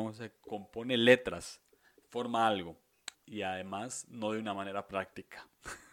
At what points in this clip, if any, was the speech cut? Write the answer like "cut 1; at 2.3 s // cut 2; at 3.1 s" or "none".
cut 1; at 3.1 s